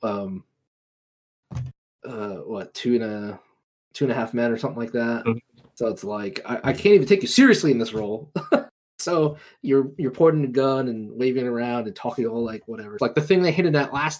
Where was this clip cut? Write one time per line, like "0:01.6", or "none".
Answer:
0:13.0